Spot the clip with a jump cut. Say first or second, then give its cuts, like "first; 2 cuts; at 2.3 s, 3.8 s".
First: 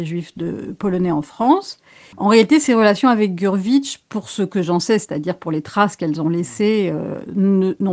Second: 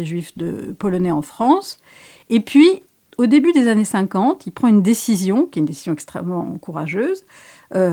first; 1 cut; at 2.1 s